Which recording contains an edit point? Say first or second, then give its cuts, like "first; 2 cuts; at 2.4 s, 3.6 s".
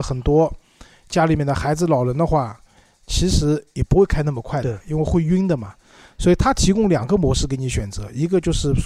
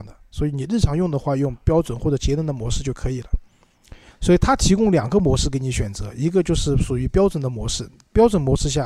second; 1 cut; at 4.1 s